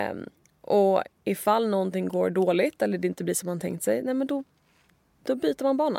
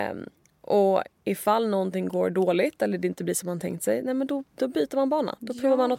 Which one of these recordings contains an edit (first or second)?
second